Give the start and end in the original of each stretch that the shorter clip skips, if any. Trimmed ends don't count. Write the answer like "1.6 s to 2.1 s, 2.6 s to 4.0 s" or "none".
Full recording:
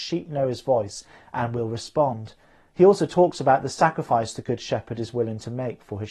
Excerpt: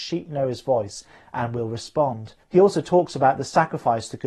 2.4 s to 2.7 s

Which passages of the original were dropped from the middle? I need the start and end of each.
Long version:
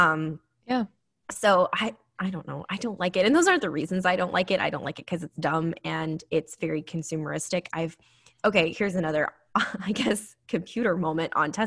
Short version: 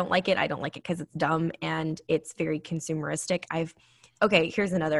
none

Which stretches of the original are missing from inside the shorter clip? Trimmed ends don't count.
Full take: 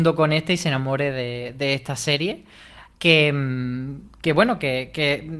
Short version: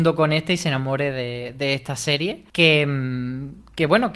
2.5 s to 3.0 s

